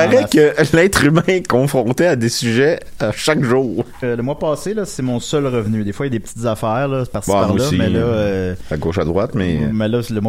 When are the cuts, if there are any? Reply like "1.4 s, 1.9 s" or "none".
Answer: 4.0 s